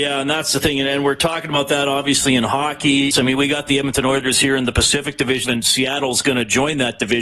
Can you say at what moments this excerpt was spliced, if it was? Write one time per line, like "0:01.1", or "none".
0:03.1
0:05.4